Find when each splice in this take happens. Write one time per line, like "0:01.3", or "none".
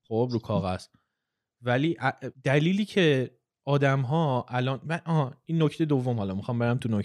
0:02.3